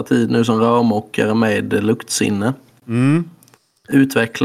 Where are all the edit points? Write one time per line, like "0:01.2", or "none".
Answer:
none